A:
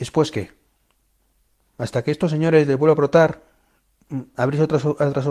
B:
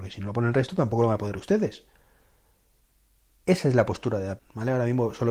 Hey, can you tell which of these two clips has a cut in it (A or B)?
B